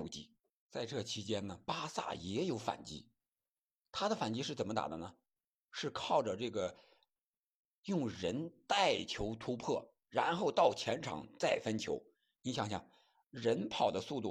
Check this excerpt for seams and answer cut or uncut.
uncut